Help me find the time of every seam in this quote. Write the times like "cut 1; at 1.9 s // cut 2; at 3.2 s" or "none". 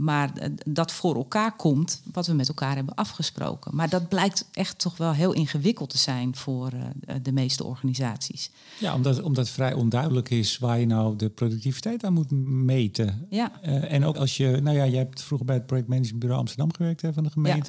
cut 1; at 14.1 s